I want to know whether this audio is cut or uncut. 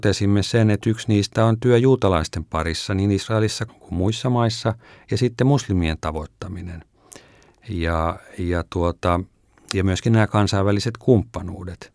cut